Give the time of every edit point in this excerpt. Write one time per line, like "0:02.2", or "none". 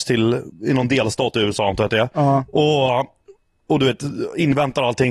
none